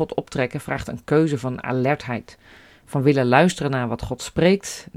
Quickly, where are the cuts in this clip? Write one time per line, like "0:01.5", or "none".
none